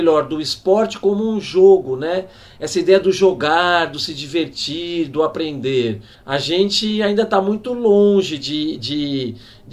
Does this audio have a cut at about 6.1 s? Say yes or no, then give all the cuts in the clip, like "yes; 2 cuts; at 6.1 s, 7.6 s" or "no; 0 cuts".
yes; 1 cut; at 6.1 s